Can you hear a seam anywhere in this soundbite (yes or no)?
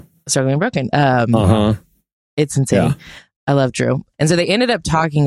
yes